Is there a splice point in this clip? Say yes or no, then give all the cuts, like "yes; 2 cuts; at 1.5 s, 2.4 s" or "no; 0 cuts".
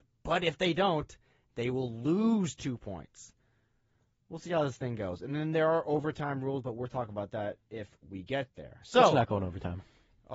no; 0 cuts